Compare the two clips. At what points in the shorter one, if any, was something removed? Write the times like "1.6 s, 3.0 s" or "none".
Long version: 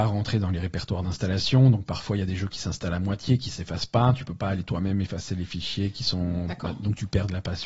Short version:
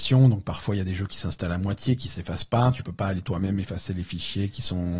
none